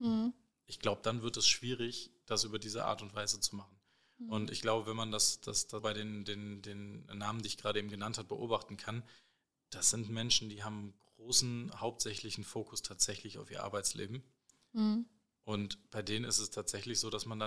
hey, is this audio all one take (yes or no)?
no